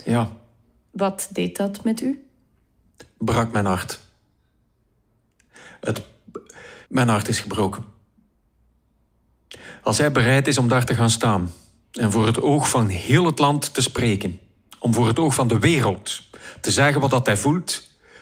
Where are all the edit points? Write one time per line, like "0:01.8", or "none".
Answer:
0:06.8